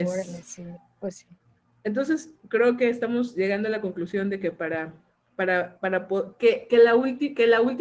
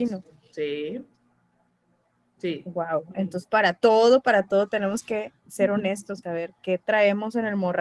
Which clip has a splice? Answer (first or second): second